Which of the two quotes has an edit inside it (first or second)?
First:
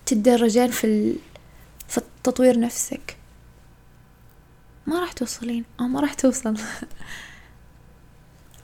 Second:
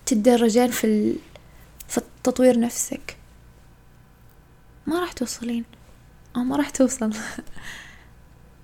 first